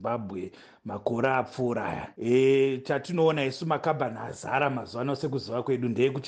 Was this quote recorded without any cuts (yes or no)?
yes